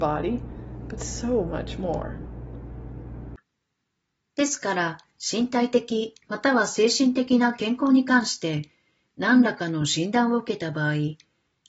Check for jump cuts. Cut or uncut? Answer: uncut